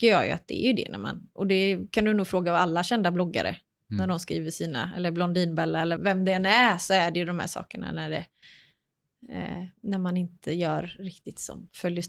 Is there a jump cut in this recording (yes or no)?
yes